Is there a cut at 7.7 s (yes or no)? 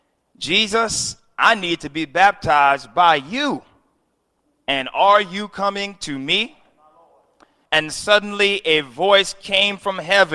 yes